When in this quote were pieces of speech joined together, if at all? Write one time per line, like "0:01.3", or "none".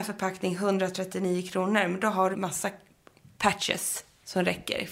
0:02.3